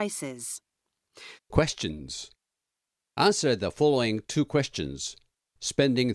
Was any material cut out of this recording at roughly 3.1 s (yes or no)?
no